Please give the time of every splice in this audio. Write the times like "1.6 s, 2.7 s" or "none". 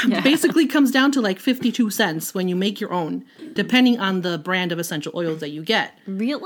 3.6 s